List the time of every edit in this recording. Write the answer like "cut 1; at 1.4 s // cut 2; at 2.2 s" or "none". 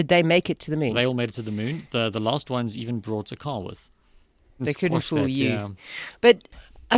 cut 1; at 4.6 s